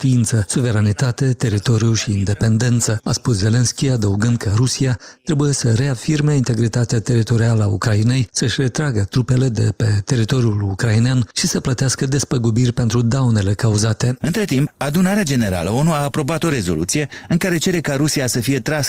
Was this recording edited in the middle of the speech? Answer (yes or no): yes